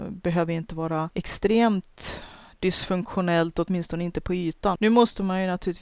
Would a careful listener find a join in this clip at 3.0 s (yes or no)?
no